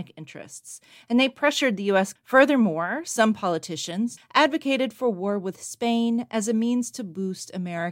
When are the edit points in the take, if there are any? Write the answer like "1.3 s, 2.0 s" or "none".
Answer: 2.2 s, 4.2 s

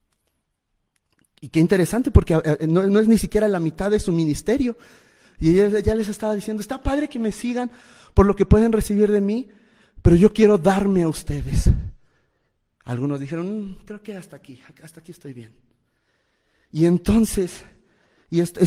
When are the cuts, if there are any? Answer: none

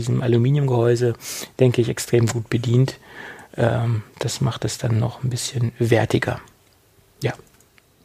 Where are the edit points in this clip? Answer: none

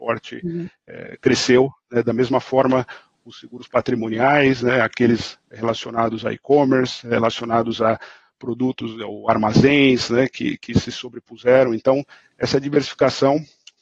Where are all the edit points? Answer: none

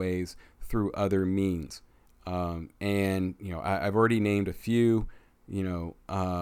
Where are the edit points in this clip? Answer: none

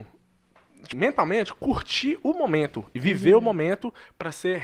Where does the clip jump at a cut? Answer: 0.9 s

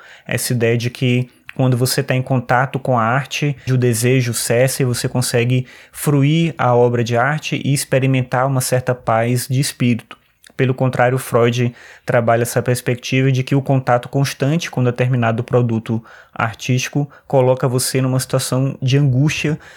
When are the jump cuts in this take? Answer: 3.7 s

